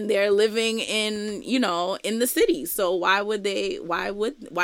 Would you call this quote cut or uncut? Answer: uncut